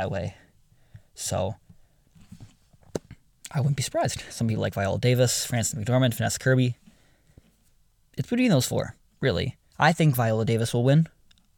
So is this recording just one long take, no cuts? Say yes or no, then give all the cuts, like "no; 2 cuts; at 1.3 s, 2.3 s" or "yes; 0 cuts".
no; 2 cuts; at 4.3 s, 9.7 s